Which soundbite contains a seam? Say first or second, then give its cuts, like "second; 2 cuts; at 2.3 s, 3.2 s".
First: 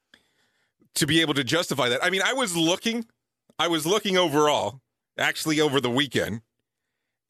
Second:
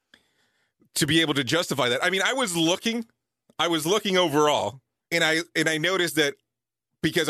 second; 1 cut; at 5.1 s